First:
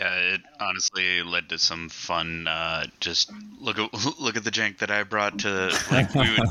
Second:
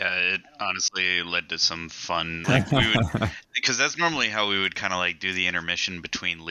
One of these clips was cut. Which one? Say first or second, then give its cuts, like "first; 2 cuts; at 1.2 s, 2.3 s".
second; 1 cut; at 2.4 s